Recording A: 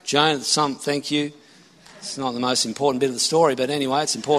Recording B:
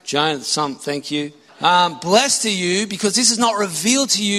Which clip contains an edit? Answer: B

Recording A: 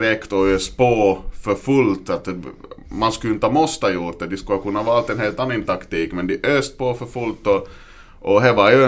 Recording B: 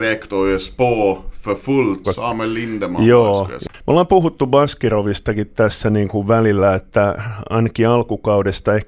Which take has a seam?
B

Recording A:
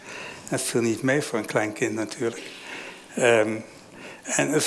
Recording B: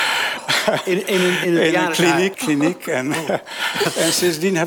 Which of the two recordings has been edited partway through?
B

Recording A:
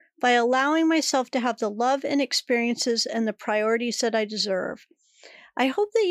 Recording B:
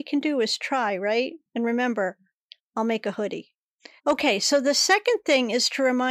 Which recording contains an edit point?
B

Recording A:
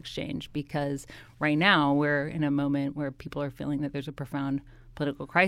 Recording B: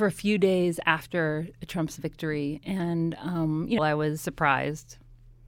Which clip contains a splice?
B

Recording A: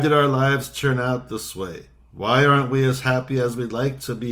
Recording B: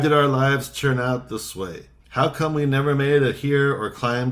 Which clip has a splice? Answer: B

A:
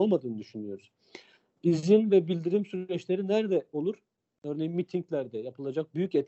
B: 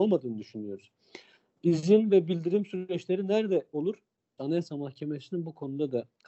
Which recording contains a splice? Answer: B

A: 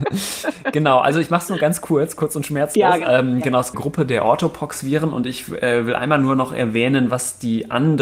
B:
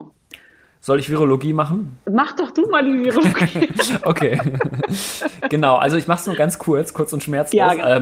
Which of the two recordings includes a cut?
A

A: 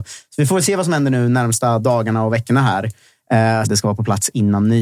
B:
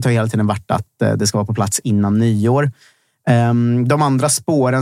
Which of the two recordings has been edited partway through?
A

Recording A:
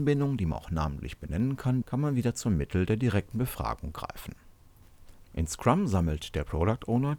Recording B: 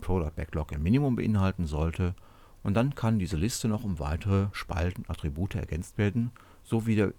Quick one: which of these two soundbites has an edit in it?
A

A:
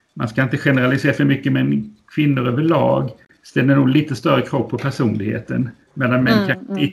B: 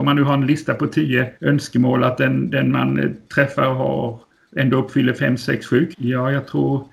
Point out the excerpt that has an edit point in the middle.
B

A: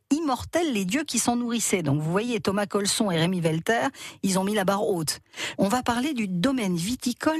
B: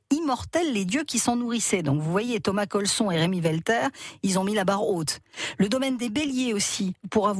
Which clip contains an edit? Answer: A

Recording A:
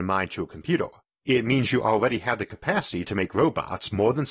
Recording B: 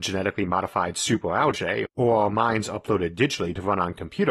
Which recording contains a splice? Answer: B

